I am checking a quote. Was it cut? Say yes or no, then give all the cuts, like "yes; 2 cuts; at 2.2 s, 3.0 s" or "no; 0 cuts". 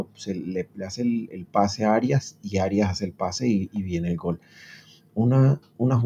no; 0 cuts